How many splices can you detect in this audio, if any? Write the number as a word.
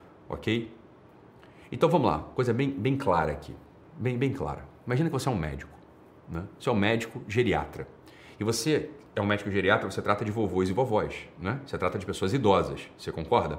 zero